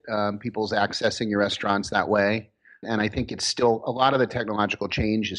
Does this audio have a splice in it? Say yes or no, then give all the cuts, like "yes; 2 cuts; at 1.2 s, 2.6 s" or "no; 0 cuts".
yes; 1 cut; at 2.8 s